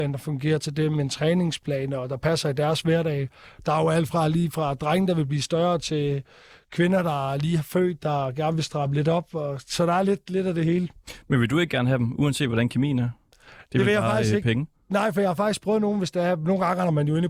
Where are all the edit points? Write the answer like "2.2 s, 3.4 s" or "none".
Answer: none